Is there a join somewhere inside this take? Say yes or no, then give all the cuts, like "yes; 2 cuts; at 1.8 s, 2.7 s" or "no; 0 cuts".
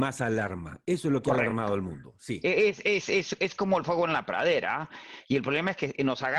no; 0 cuts